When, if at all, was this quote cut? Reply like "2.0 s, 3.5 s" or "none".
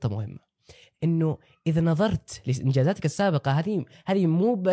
none